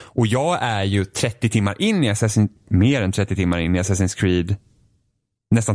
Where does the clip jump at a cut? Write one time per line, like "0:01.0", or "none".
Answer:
none